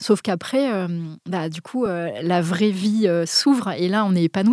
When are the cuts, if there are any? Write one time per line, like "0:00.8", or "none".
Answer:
none